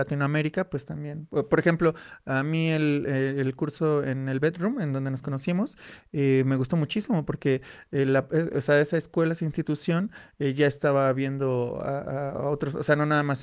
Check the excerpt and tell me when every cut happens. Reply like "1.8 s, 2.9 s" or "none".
none

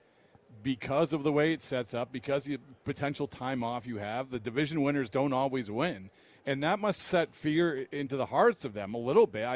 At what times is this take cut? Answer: none

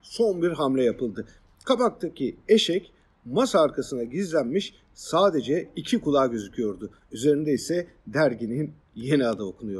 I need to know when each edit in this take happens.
none

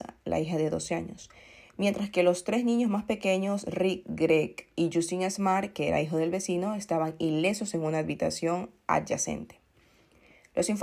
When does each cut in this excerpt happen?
none

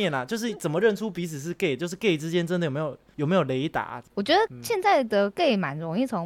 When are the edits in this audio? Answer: 4.1 s

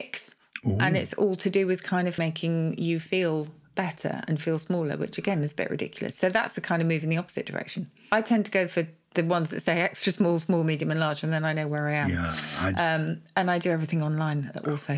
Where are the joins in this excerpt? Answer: 2.2 s

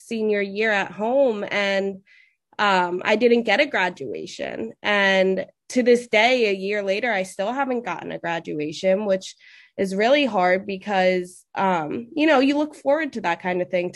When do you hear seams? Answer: none

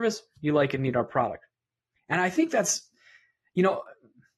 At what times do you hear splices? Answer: none

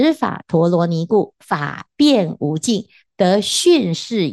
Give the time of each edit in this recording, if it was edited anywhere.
none

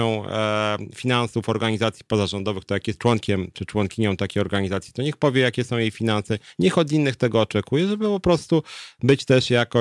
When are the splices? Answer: none

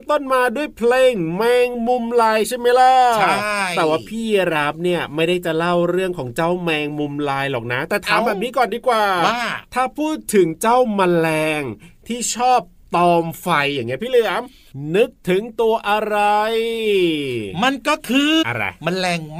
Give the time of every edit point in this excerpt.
18.4 s

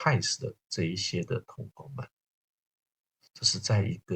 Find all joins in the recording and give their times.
none

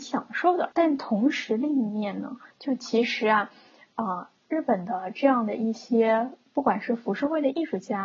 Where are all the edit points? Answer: 2.5 s

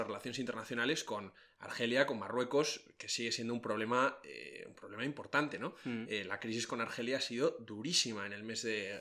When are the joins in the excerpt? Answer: none

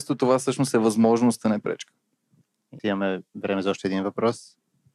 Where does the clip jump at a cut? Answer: 2.8 s

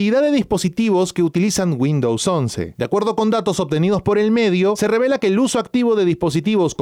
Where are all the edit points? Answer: none

